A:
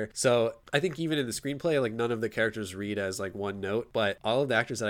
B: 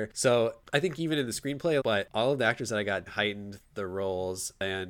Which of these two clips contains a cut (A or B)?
B